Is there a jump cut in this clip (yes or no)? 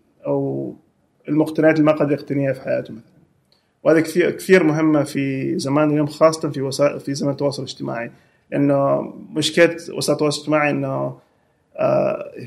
no